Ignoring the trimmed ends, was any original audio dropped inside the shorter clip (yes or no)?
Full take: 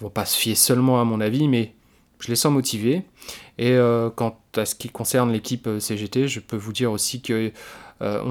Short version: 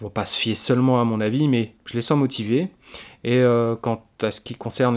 yes